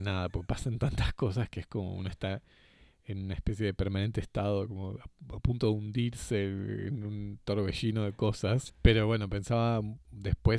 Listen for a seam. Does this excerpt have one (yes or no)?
yes